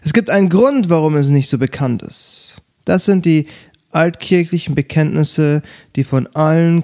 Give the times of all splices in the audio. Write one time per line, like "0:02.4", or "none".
0:02.7